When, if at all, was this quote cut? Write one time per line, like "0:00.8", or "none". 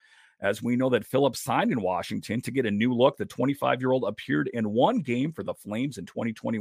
none